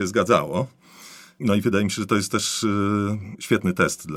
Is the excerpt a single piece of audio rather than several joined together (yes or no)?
yes